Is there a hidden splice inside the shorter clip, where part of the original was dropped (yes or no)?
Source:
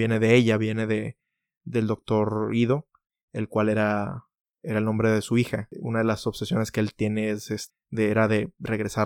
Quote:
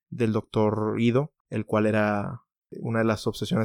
yes